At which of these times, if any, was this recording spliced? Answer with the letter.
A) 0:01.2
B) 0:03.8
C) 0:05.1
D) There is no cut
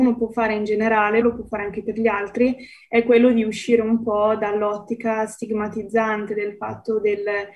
A